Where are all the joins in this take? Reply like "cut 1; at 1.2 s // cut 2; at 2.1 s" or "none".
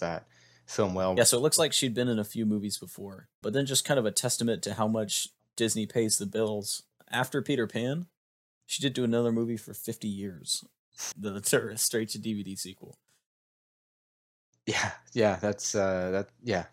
cut 1; at 1.2 s // cut 2; at 3.4 s // cut 3; at 11.1 s